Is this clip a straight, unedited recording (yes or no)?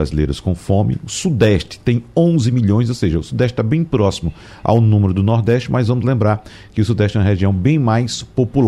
yes